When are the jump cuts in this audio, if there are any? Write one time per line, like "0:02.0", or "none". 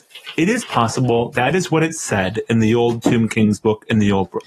0:01.3